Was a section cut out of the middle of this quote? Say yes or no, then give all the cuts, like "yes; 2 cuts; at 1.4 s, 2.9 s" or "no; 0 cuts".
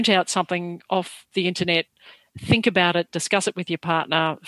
no; 0 cuts